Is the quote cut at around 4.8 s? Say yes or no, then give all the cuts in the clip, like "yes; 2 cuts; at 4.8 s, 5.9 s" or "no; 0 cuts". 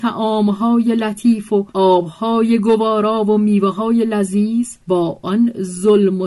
yes; 2 cuts; at 1.7 s, 4.8 s